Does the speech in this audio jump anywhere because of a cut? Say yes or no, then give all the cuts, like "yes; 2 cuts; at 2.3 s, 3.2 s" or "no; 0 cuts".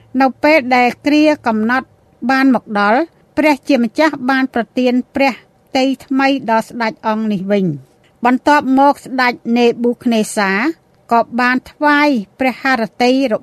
no; 0 cuts